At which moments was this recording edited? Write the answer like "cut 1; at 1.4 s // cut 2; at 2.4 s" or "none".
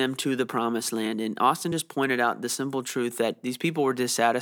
none